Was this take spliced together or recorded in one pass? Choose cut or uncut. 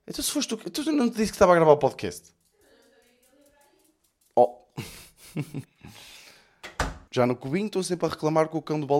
cut